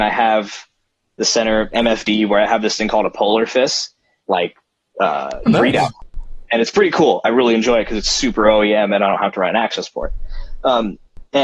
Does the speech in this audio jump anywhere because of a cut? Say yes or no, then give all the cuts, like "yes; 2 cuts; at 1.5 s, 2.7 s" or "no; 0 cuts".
yes; 2 cuts; at 4.2 s, 5.5 s